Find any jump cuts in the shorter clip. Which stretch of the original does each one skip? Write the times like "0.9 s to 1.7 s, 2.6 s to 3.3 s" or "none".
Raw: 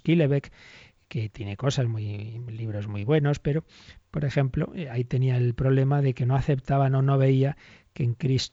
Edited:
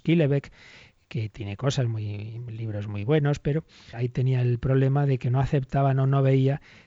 3.9 s to 4.9 s